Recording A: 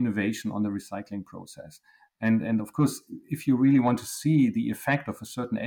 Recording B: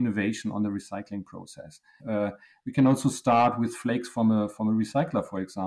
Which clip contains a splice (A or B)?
B